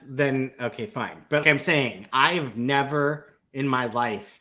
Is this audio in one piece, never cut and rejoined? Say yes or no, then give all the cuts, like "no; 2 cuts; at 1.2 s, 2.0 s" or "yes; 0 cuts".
no; 1 cut; at 1.4 s